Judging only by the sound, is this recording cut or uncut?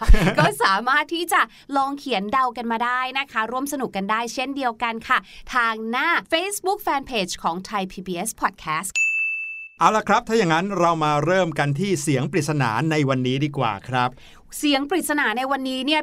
uncut